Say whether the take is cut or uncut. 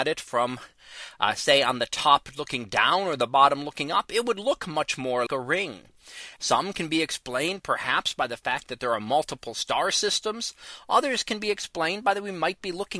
cut